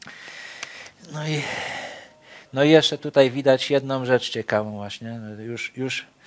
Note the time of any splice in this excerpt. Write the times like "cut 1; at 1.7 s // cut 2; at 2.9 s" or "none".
cut 1; at 3.0 s

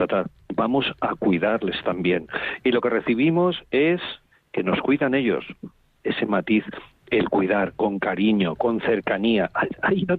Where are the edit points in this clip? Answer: cut 1; at 6.0 s // cut 2; at 8.6 s

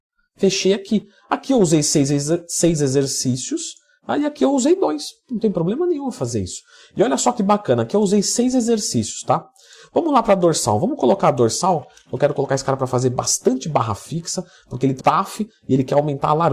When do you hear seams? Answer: cut 1; at 15.0 s

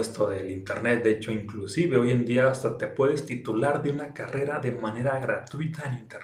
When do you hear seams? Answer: none

